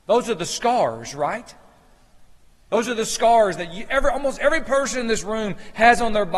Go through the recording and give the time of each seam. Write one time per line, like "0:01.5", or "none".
none